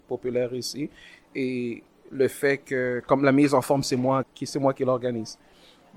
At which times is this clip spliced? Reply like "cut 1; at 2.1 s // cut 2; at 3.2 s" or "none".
cut 1; at 4.2 s